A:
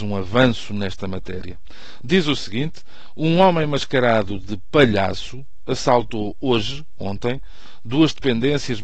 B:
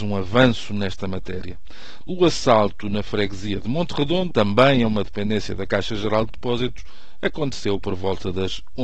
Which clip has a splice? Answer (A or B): B